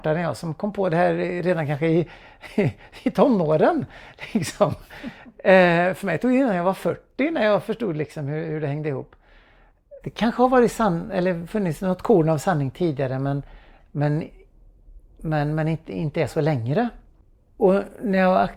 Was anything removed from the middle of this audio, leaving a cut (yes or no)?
yes